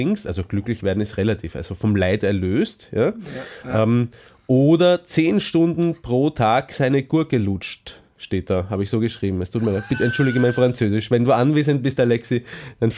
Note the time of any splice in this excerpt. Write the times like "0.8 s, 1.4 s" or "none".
none